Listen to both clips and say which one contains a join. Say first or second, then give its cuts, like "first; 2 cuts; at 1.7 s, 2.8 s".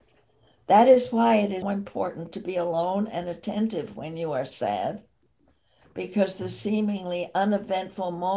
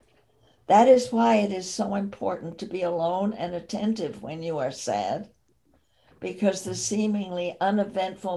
first; 1 cut; at 1.6 s